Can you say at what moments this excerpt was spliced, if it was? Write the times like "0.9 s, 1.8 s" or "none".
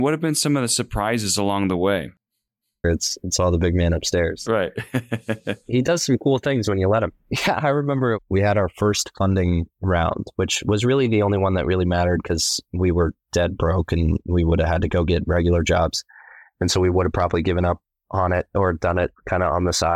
2.8 s

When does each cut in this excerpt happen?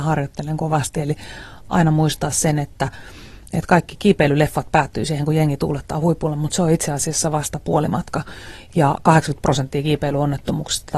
none

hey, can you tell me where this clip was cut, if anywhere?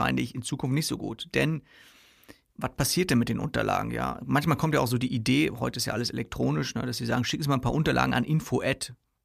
none

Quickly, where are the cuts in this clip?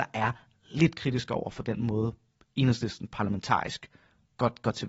none

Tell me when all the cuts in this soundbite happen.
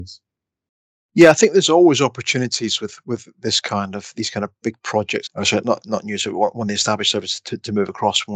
5.2 s

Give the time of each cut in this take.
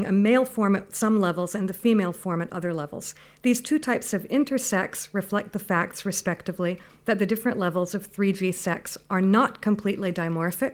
none

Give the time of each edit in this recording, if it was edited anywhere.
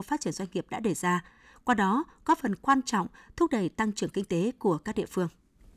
none

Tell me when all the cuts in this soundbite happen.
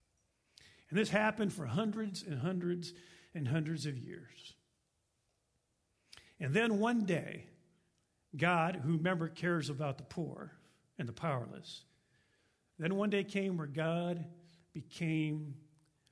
none

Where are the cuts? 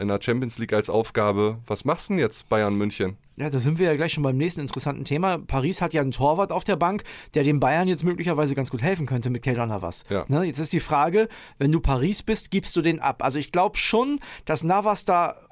none

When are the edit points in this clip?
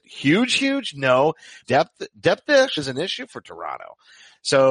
1.6 s, 2.8 s

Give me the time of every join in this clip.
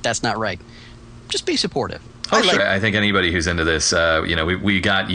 2.6 s

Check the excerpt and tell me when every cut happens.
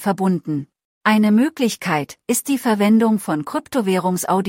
1.0 s, 2.2 s

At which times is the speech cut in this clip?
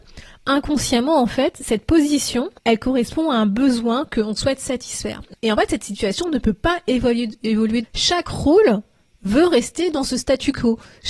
2.6 s, 5.4 s, 7.8 s

